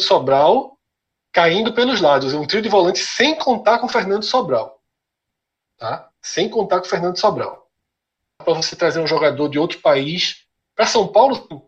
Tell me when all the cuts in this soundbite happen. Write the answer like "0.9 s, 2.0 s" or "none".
8.4 s